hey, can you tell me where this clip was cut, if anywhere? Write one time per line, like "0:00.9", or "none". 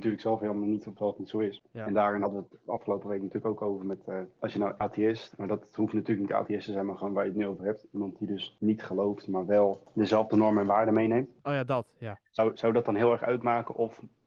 0:01.6